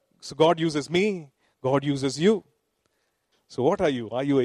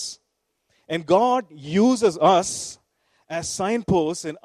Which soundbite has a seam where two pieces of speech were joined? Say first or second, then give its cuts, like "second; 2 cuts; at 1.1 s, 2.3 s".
first; 1 cut; at 3.3 s